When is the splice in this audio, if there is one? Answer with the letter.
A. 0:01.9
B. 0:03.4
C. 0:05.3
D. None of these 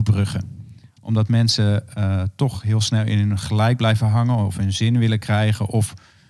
D